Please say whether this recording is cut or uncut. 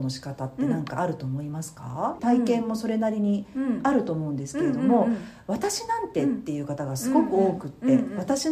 cut